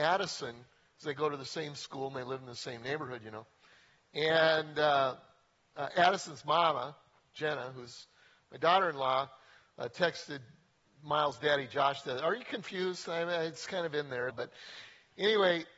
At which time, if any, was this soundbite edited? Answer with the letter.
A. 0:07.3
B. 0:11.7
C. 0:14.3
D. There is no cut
C